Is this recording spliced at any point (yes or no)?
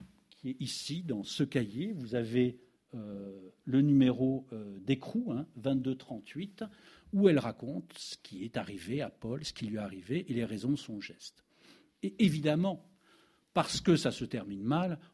no